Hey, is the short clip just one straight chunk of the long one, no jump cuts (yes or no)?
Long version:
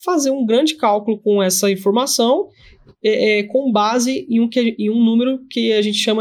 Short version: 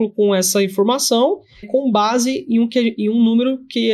no